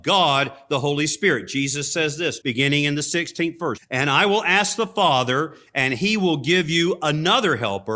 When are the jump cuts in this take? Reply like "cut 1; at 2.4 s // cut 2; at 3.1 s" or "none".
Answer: cut 1; at 2.4 s // cut 2; at 3.8 s